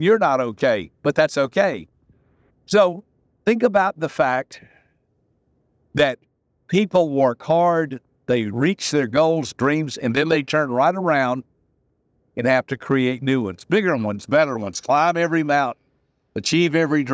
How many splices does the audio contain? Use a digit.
1